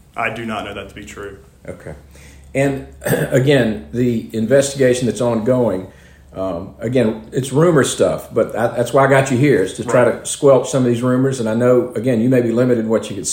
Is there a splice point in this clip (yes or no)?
no